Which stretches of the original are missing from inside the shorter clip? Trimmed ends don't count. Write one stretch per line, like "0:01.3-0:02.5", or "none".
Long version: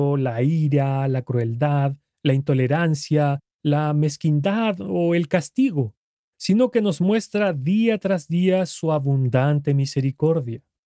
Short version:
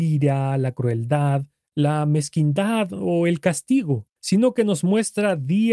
0:02.2-0:03.5
0:06.0-0:06.3